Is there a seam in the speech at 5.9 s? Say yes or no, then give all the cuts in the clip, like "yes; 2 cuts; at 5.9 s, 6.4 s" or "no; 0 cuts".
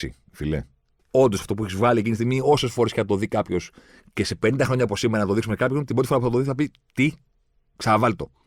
no; 1 cut; at 1.0 s